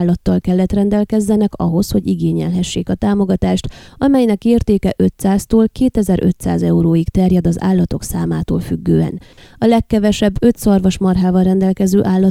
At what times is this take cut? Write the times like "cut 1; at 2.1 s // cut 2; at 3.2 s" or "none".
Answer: cut 1; at 9.4 s